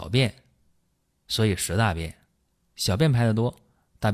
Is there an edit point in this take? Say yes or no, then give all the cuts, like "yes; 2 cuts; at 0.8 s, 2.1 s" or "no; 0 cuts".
no; 0 cuts